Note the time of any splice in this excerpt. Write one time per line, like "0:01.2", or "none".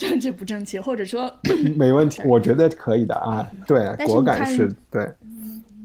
0:02.2
0:03.7